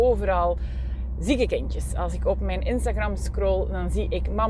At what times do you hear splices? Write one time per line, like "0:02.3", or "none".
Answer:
none